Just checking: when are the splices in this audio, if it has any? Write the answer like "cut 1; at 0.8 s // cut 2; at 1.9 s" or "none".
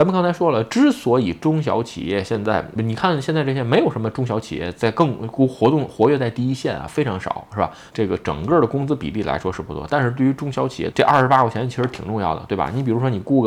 cut 1; at 2.8 s // cut 2; at 7.9 s // cut 3; at 10.9 s

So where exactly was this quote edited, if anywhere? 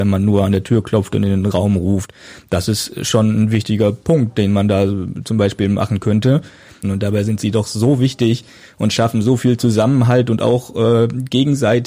cut 1; at 6.8 s

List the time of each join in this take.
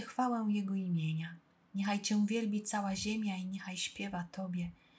cut 1; at 1.7 s

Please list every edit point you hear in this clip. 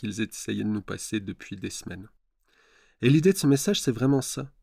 none

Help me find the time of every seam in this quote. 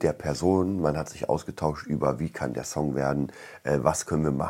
none

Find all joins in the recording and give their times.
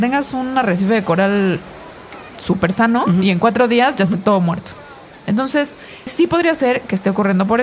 cut 1; at 6.1 s

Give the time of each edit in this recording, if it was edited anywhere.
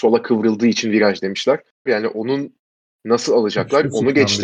cut 1; at 1.9 s

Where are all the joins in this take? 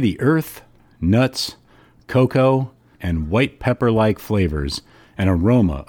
cut 1; at 2.9 s

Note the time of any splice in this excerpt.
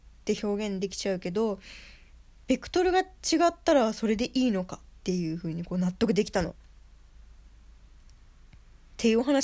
none

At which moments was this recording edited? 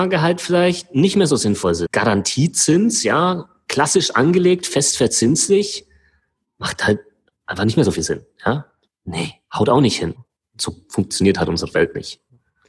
cut 1; at 1.9 s // cut 2; at 8.9 s // cut 3; at 10.2 s

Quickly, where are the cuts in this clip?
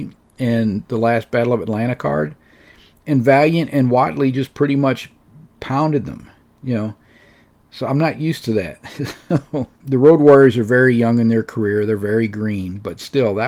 cut 1; at 9.8 s

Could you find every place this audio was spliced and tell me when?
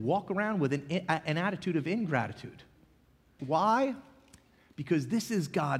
cut 1; at 3.4 s

